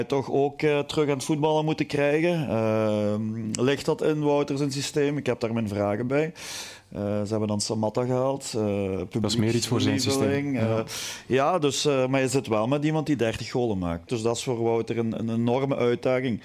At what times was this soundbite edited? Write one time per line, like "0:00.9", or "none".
0:14.1